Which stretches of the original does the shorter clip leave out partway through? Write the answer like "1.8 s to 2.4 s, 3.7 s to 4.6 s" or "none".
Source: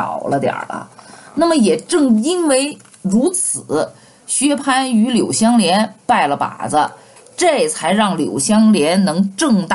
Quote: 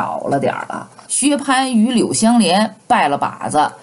1.1 s to 4.2 s